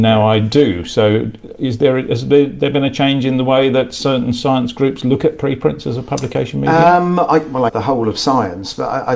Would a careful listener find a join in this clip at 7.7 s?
yes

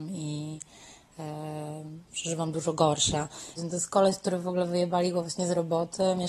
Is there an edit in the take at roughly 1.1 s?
no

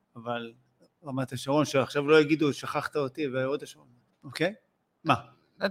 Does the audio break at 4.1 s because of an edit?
yes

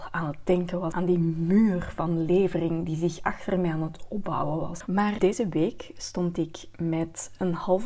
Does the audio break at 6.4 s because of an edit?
no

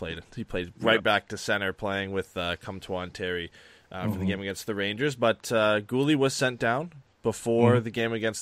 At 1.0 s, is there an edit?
no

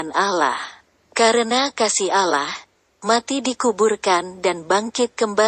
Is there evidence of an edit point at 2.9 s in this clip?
yes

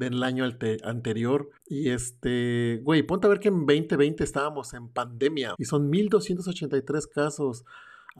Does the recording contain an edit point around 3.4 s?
no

